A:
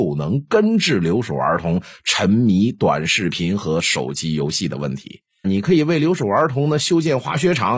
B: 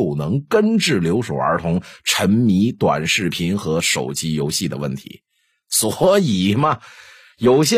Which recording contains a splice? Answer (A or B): A